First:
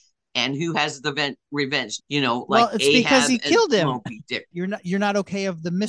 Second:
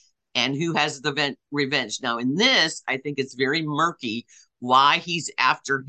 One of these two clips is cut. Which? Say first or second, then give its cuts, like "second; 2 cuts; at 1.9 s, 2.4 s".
first; 2 cuts; at 2.0 s, 4.5 s